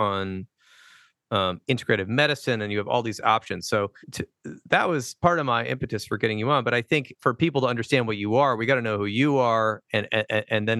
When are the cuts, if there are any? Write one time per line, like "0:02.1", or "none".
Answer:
0:04.0